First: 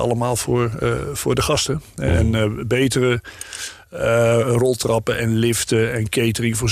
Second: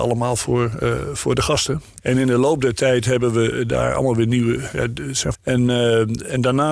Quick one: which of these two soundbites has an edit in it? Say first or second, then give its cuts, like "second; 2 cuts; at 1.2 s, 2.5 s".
second; 2 cuts; at 2.0 s, 5.3 s